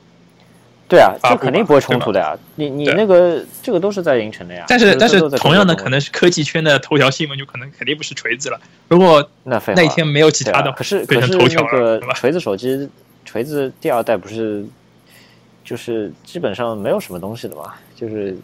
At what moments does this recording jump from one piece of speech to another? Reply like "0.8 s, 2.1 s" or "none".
7.7 s, 10.8 s